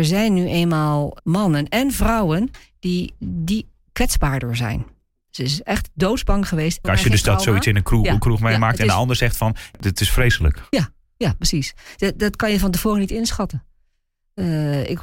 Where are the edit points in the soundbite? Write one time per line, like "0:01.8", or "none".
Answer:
0:01.2
0:05.3
0:06.8